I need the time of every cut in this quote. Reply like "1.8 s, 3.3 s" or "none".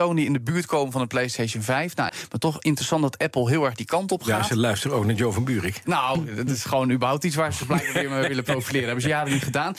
2.1 s